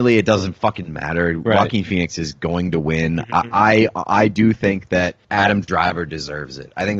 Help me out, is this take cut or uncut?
cut